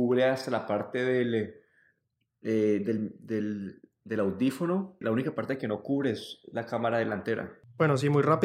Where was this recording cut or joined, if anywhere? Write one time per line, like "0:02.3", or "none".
0:05.0